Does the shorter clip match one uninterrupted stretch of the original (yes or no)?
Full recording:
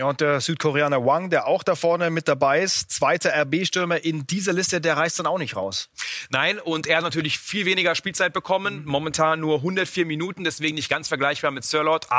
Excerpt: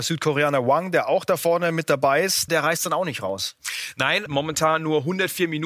no